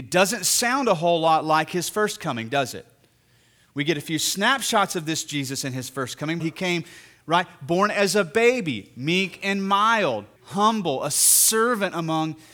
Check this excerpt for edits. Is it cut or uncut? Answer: cut